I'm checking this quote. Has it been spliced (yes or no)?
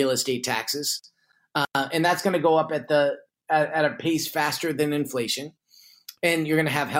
no